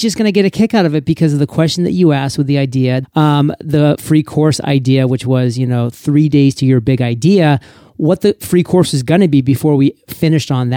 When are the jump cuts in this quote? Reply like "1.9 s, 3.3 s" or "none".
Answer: 3.0 s